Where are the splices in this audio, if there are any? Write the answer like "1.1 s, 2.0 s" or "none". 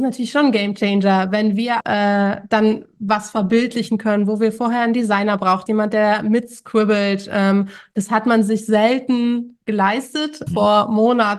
1.8 s, 5.7 s, 10.5 s